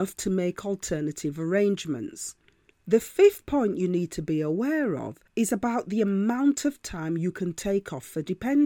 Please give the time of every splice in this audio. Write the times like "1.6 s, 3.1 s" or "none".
2.7 s, 5.3 s